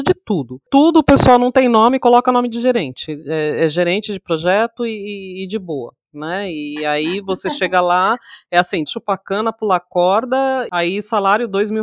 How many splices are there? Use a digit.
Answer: 1